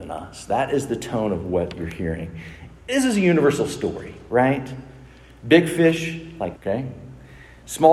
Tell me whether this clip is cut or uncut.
cut